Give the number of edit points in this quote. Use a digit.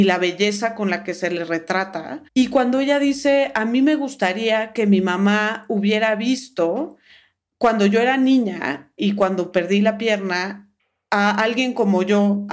2